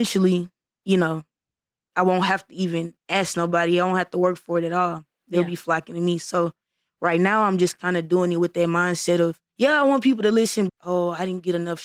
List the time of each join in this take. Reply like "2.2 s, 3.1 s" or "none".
9.5 s, 10.7 s